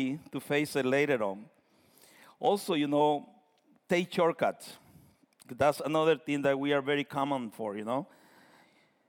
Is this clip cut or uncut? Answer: uncut